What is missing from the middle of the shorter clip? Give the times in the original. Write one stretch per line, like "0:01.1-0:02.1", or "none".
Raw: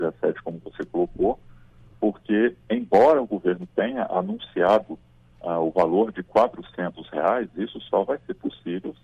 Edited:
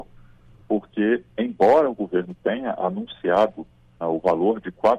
0:05.3-0:05.5